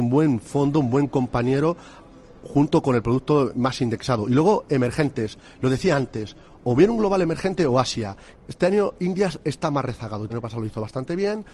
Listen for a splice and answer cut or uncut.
cut